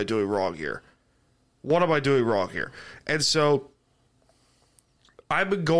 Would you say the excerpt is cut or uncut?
uncut